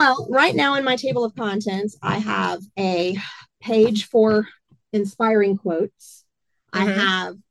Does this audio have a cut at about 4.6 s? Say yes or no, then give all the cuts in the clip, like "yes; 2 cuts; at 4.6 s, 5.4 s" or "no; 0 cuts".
no; 0 cuts